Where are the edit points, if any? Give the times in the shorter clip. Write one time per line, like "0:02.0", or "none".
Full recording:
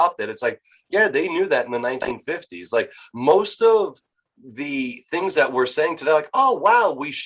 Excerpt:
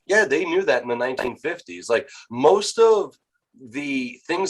none